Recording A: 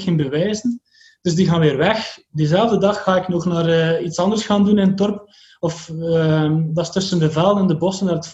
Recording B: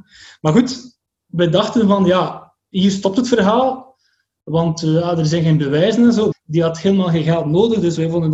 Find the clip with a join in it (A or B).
B